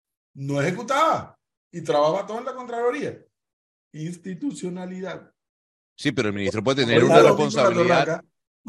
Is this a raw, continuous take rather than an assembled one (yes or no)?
yes